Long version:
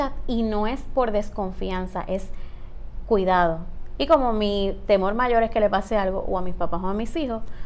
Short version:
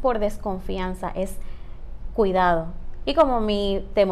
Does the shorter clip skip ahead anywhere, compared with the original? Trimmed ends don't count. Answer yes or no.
no